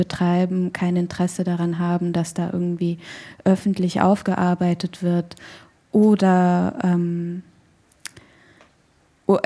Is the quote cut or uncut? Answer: uncut